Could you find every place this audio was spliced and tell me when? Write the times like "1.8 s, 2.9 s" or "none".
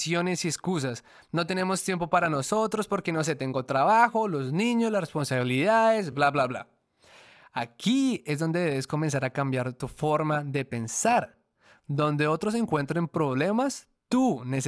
none